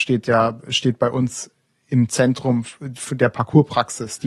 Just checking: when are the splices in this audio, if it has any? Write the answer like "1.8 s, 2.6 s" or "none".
none